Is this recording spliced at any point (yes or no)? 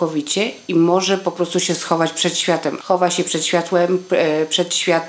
yes